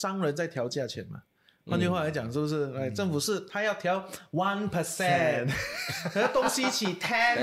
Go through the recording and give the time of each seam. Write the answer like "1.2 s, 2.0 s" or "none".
none